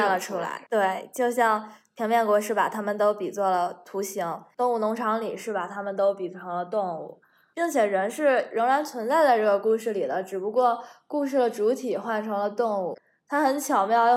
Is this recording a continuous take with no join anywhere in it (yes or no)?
yes